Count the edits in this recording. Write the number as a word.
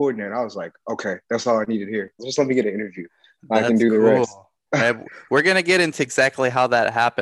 one